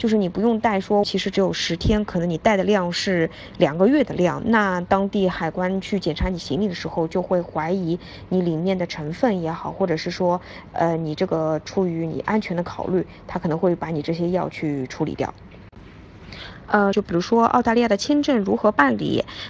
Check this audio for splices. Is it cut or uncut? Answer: cut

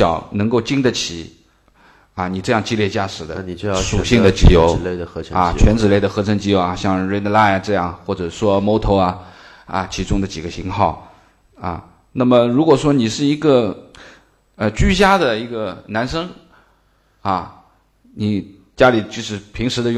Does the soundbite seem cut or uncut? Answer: uncut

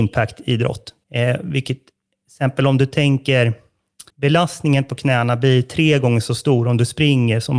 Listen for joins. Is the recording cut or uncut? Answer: cut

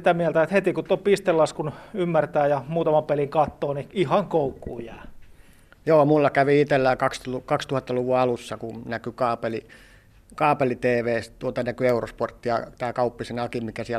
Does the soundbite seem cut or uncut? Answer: uncut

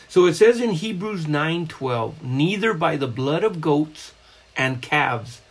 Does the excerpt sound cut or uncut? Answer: uncut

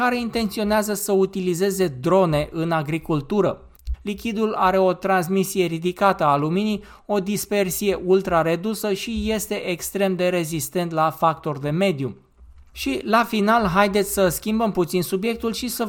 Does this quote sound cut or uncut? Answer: cut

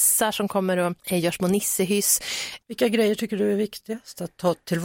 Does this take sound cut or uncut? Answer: cut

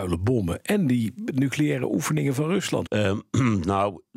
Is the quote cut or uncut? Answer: cut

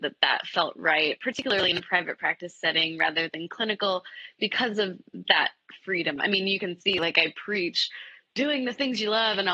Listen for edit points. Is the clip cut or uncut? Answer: uncut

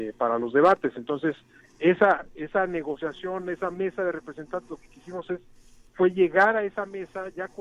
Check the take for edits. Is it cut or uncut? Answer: uncut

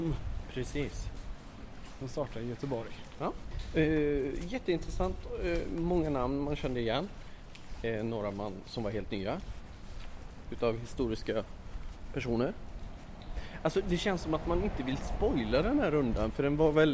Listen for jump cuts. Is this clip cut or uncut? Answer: uncut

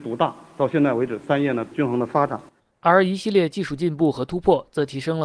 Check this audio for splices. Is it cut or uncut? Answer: uncut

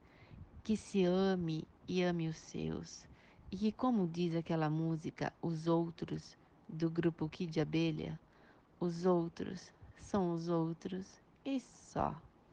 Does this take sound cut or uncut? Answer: uncut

